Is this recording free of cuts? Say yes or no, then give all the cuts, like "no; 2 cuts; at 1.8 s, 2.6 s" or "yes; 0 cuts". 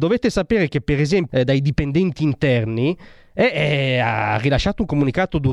no; 1 cut; at 1.3 s